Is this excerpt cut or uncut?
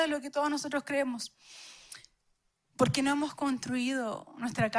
uncut